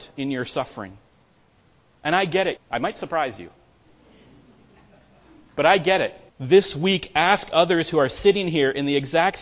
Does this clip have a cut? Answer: yes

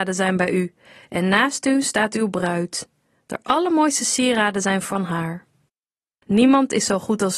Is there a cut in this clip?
yes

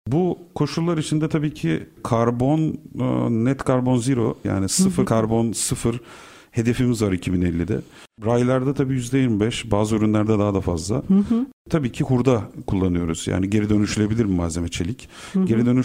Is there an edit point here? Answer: yes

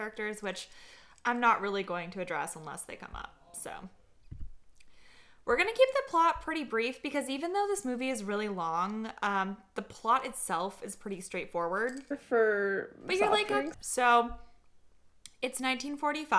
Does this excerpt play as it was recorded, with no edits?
no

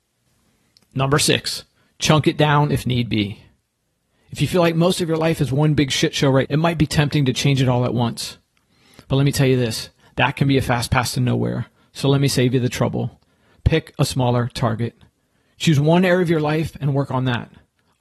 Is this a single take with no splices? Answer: no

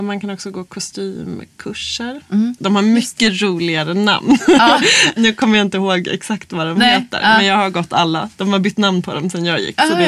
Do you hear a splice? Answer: yes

